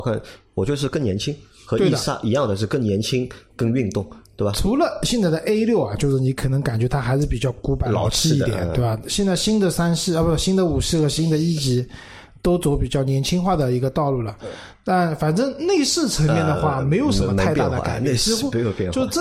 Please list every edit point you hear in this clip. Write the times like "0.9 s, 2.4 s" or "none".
none

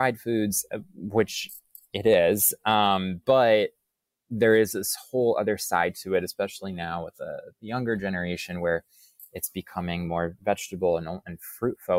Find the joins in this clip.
none

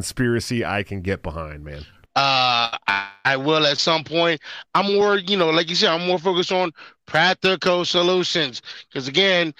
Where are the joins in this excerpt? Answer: 2.1 s

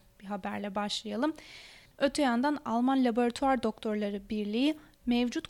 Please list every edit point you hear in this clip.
1.9 s

